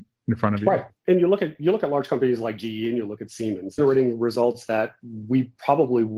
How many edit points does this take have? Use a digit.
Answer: 1